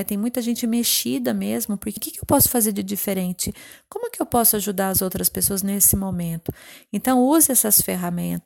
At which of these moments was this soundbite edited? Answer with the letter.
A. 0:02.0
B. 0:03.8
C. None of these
A